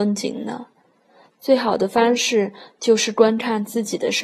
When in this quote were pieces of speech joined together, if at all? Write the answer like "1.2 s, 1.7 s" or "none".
none